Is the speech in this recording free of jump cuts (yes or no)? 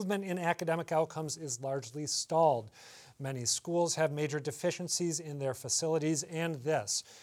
yes